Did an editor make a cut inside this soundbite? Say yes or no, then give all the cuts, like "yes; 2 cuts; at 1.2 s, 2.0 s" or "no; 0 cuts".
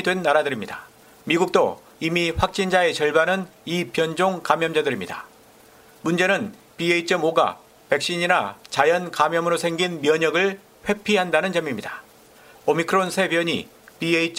yes; 2 cuts; at 5.9 s, 12.5 s